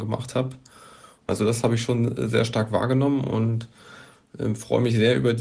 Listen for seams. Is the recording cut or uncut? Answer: cut